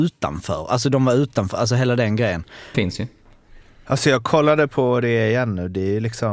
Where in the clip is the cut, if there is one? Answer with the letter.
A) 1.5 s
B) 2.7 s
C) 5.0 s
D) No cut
B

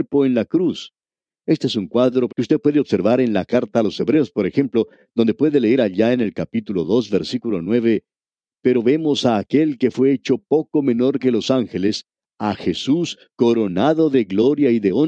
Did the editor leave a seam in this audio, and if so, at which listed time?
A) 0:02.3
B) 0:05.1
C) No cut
A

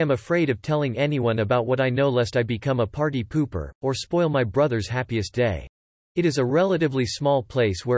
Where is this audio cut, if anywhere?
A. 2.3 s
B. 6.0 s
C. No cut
B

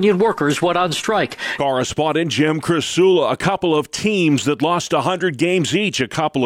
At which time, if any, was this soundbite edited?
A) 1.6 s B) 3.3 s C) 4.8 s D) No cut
A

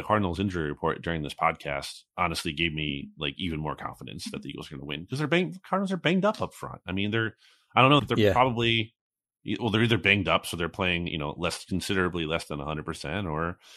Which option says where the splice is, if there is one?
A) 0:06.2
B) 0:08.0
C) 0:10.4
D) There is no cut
B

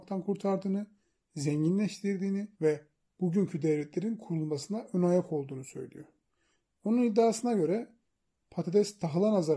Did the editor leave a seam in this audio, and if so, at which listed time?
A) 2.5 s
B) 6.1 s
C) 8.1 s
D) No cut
A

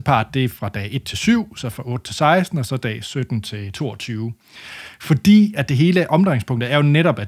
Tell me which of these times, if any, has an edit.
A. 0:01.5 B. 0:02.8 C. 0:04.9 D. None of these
D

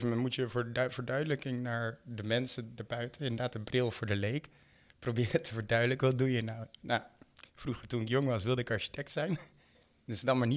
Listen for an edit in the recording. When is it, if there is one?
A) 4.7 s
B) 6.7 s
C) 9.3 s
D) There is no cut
D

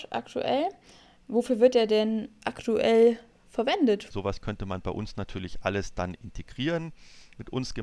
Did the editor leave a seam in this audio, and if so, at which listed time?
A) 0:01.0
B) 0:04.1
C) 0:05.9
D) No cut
B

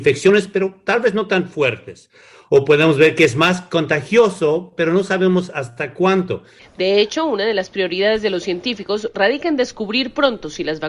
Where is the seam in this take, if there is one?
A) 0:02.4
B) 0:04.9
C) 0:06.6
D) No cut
C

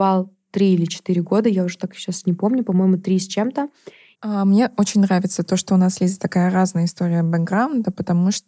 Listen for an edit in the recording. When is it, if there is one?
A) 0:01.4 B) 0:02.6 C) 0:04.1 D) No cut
C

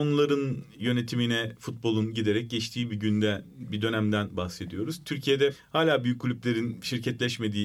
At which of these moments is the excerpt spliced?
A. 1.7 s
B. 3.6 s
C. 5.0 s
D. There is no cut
D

